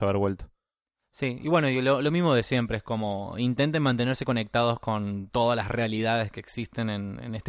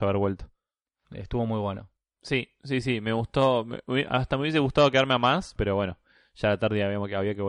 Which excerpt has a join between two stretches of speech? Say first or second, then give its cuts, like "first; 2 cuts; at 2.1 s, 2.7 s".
second; 2 cuts; at 1.0 s, 5.6 s